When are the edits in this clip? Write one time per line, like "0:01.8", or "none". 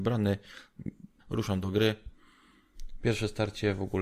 0:01.2